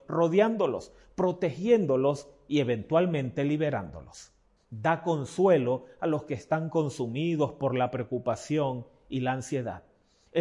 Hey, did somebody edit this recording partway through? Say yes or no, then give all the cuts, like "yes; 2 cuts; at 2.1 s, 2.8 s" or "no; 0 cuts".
yes; 1 cut; at 4.6 s